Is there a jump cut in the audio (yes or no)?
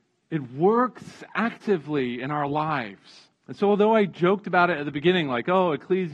yes